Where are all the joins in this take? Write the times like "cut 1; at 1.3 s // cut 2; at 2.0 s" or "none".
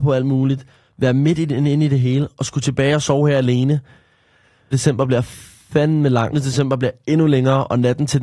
cut 1; at 4.7 s // cut 2; at 6.3 s